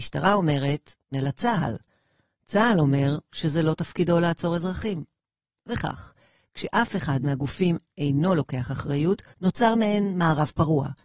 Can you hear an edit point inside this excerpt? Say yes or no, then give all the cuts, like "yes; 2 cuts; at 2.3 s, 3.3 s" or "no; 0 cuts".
yes; 2 cuts; at 1.1 s, 9.3 s